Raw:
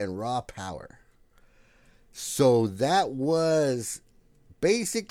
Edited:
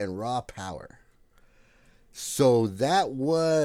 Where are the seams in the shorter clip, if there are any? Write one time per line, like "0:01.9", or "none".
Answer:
none